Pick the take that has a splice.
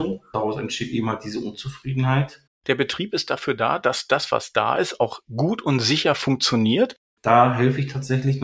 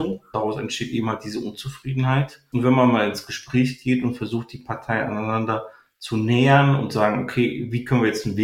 first; 2 cuts; at 2.5 s, 7.2 s

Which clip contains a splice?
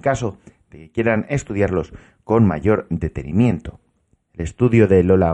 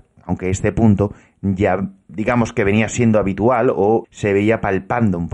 second; 2 cuts; at 2.1 s, 4.0 s

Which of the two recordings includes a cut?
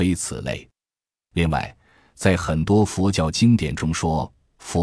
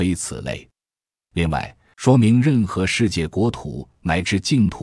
second; 1 cut; at 1.9 s

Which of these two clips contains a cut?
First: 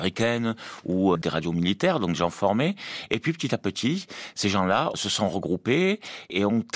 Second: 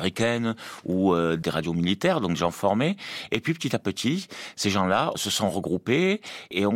first; 1 cut; at 1.1 s

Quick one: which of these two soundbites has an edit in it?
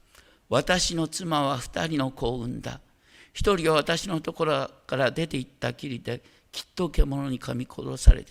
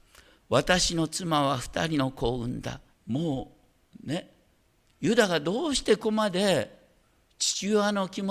second; 2 cuts; at 2.9 s, 6.0 s

